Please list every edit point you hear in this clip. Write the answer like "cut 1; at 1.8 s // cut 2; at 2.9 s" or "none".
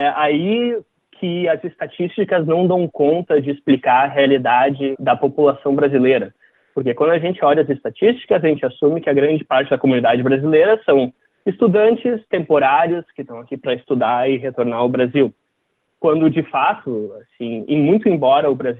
cut 1; at 5.0 s